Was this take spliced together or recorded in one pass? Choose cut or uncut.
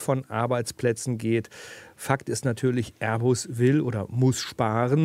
uncut